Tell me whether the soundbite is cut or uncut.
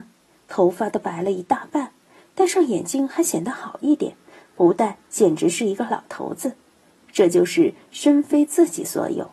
uncut